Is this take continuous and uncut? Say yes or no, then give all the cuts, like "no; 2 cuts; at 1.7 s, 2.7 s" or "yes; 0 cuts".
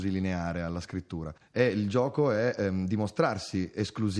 no; 1 cut; at 1.4 s